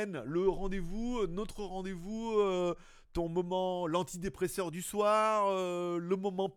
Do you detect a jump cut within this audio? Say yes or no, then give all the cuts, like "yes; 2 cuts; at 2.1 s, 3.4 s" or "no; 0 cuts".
no; 0 cuts